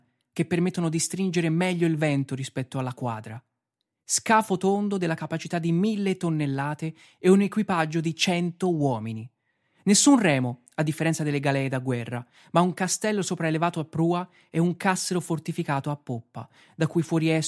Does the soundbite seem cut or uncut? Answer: uncut